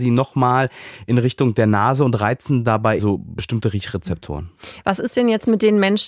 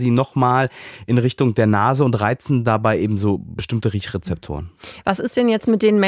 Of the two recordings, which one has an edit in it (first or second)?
first